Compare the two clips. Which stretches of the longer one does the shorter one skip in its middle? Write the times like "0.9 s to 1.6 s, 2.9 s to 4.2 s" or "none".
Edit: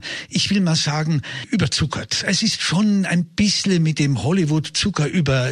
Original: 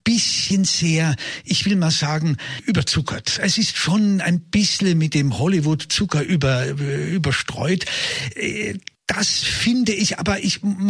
none